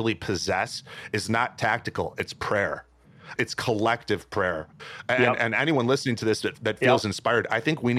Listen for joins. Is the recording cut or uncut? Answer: cut